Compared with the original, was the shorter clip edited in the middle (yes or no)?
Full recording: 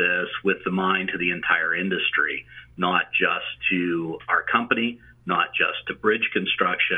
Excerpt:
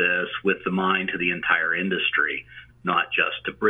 yes